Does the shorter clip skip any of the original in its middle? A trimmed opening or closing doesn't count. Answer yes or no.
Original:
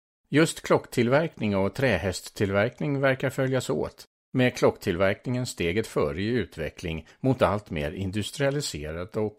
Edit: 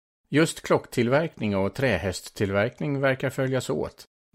no